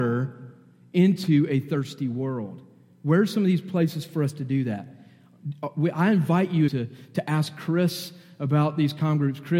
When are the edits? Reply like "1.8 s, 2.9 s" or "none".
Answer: 6.7 s